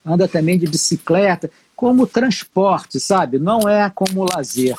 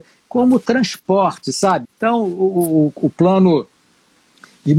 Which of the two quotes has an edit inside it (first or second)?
second